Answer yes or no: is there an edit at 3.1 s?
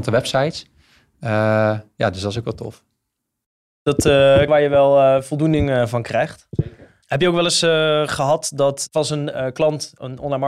no